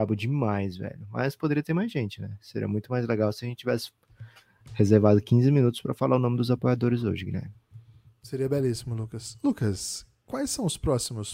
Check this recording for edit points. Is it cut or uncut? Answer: uncut